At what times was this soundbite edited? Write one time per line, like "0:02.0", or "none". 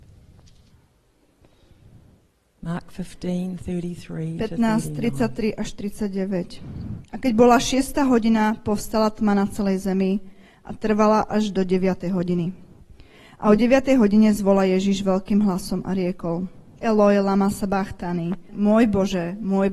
0:16.8
0:18.5